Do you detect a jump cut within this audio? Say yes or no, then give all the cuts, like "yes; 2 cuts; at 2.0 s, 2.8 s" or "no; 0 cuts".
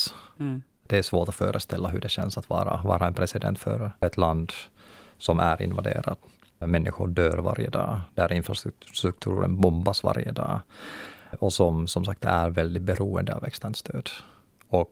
yes; 2 cuts; at 6.6 s, 11.3 s